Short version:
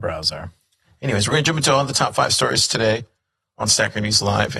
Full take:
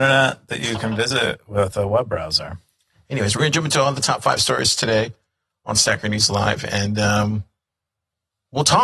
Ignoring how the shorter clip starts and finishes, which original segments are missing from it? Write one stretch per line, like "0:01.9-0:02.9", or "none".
none